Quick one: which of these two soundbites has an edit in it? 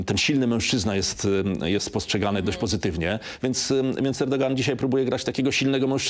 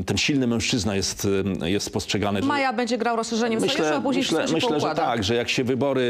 second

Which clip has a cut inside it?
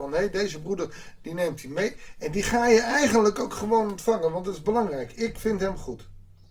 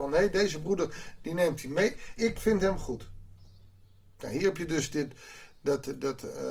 second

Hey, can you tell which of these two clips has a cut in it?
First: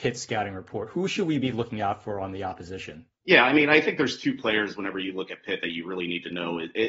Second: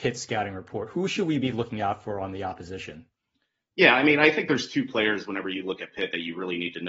first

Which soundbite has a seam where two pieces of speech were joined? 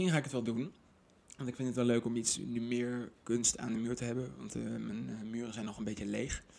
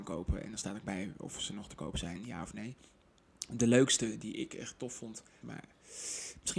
second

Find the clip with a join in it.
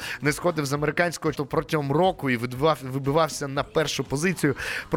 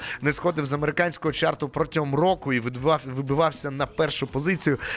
first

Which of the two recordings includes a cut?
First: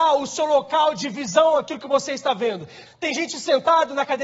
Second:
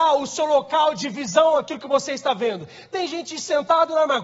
first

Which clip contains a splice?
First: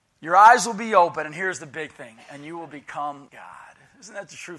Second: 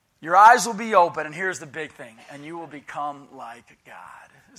first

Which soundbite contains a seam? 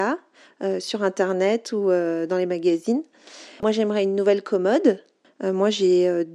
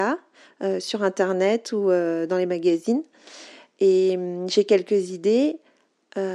first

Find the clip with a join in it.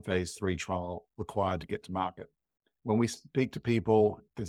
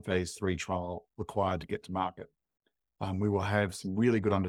first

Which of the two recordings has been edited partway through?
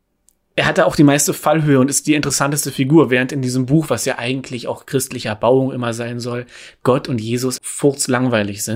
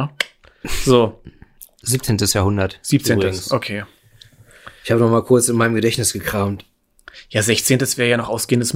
first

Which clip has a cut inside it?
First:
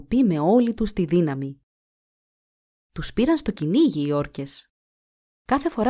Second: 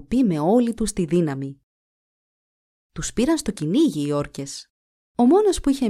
second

